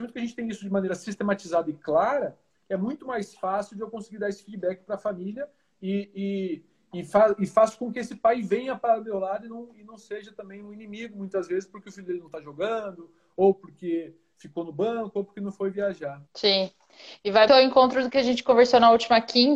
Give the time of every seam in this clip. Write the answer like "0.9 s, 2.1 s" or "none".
16.3 s, 17.5 s